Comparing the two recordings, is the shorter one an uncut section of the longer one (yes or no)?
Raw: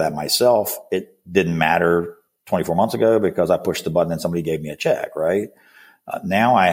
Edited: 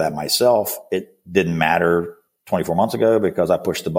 yes